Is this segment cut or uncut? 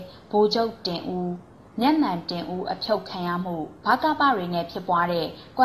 cut